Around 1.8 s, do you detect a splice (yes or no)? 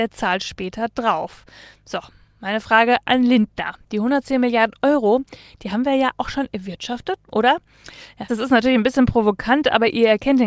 no